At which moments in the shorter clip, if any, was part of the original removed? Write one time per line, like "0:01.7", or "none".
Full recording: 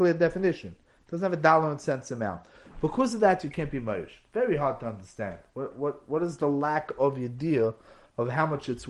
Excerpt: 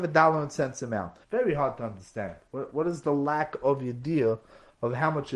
0:01.2
0:02.7